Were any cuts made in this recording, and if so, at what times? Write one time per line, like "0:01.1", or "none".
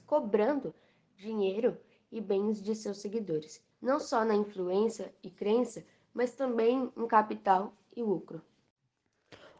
0:03.7